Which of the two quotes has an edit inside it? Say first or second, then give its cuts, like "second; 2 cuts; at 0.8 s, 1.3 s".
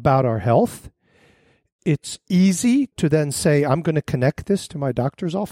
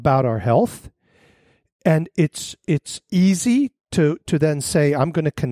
first; 2 cuts; at 1.8 s, 2.9 s